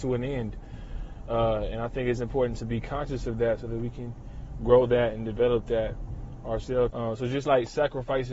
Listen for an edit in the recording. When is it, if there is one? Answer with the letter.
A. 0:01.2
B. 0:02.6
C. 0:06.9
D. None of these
C